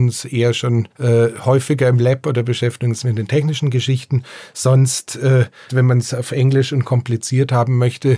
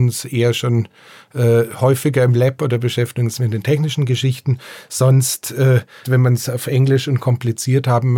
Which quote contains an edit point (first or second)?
first